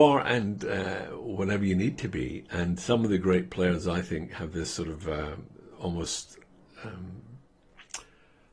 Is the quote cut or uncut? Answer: uncut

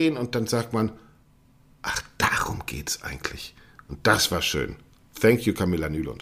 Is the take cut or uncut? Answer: uncut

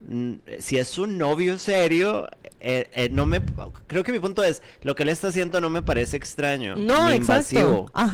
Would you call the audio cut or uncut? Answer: uncut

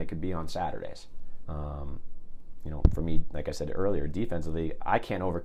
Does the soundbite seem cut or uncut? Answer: cut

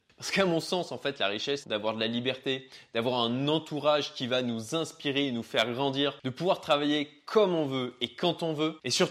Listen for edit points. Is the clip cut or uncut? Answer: cut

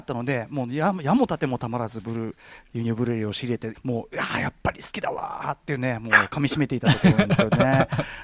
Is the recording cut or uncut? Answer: cut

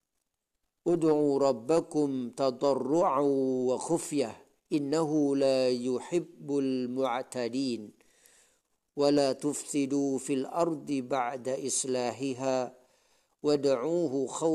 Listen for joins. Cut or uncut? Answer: uncut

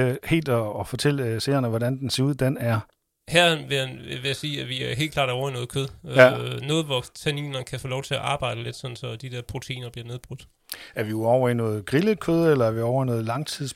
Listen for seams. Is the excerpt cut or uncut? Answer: cut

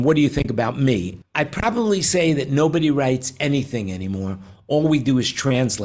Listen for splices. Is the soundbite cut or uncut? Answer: cut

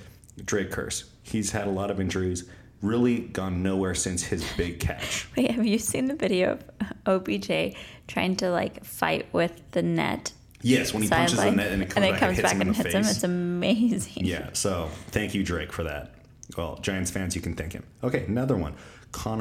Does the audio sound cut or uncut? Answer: uncut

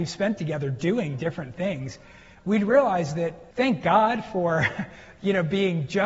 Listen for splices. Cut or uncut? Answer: cut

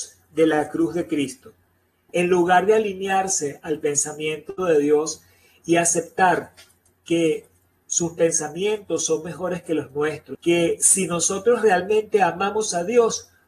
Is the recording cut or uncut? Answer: cut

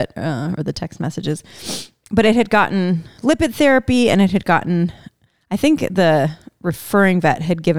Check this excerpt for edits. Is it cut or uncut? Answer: uncut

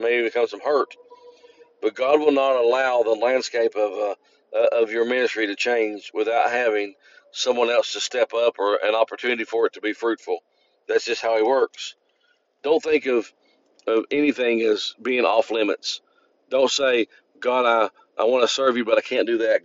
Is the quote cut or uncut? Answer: uncut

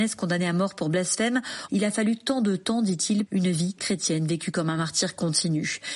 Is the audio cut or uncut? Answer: cut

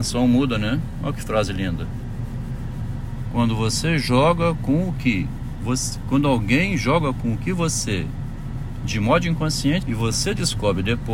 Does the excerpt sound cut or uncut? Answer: cut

